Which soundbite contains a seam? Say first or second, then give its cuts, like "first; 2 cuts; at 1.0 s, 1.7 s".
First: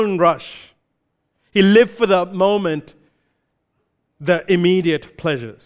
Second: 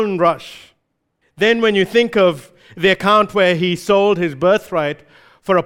second; 1 cut; at 1.2 s